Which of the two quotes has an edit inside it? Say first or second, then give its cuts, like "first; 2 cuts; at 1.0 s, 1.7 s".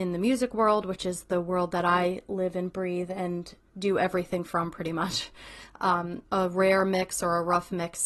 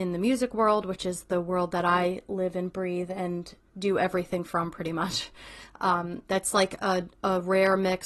first; 1 cut; at 6.3 s